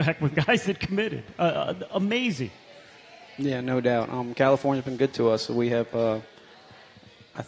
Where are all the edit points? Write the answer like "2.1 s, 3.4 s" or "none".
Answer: none